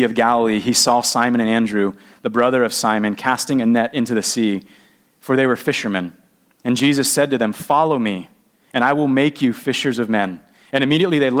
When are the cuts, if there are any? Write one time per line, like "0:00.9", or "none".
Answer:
none